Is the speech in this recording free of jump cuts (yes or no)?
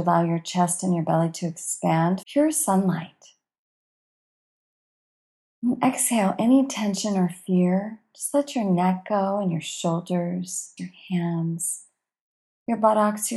no